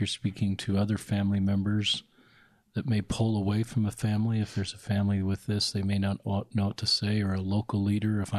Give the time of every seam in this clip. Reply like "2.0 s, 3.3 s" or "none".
none